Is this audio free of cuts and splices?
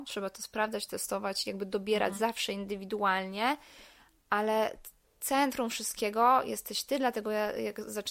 yes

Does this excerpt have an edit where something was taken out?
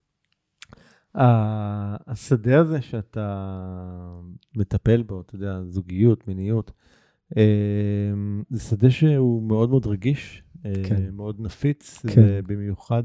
no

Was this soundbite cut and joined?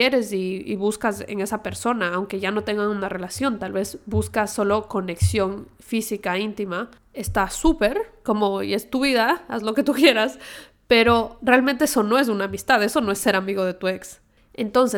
no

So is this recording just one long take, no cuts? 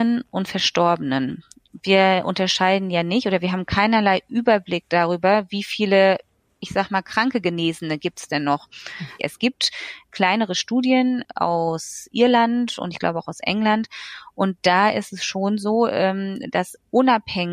no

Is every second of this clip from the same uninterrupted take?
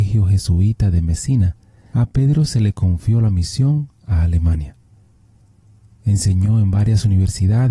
yes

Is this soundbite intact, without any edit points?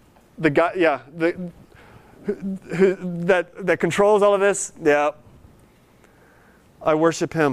yes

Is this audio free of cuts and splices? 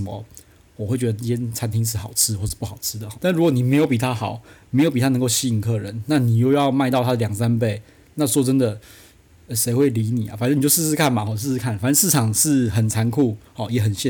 no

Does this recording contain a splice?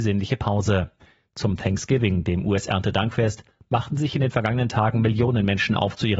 no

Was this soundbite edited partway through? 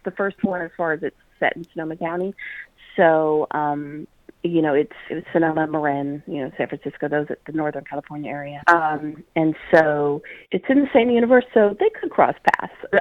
yes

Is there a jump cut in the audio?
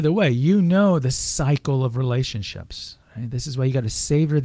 no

